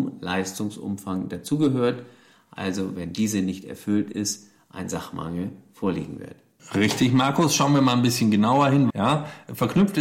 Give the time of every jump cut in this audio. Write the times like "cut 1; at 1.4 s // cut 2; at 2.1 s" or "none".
cut 1; at 8.9 s